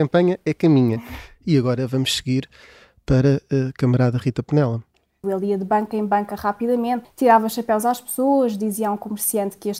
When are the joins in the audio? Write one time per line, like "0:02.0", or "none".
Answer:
0:05.2
0:07.0